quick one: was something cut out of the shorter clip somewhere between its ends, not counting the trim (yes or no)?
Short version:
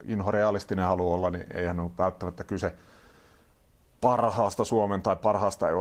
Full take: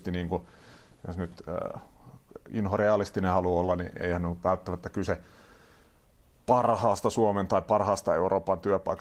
no